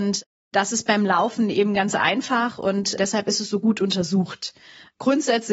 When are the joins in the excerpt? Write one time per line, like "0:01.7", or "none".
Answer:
0:03.0